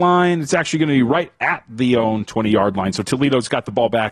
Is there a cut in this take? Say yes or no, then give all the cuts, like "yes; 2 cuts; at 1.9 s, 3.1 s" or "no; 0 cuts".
no; 0 cuts